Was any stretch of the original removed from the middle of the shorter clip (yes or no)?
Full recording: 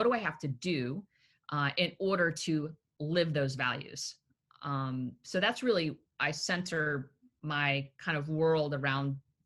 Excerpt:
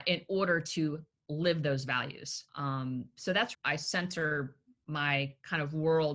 yes